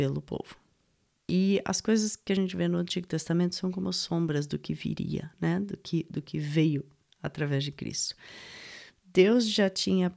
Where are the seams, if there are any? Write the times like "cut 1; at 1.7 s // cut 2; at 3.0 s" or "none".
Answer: none